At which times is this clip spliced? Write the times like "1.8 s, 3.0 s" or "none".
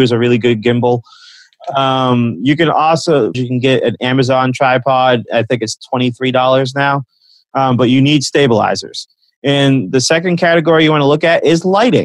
3.3 s